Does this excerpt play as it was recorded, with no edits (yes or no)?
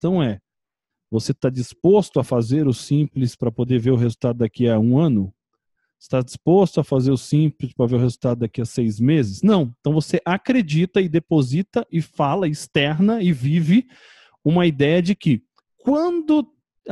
yes